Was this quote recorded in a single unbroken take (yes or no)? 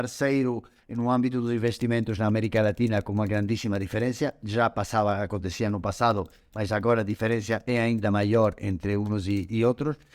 yes